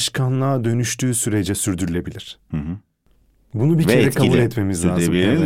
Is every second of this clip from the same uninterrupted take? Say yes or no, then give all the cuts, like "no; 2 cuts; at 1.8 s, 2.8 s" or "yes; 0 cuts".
yes; 0 cuts